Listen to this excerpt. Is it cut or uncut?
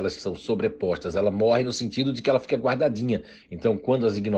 cut